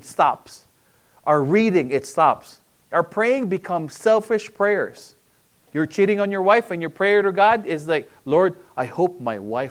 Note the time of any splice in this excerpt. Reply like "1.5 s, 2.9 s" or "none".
none